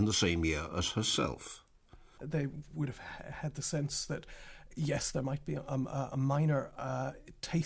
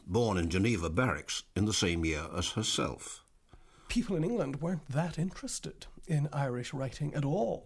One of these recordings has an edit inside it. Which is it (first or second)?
first